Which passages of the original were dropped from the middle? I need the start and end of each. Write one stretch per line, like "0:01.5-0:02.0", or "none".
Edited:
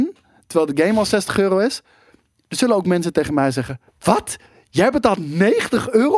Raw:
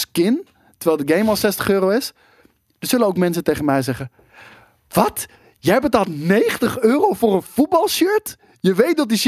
0:04.2-0:04.8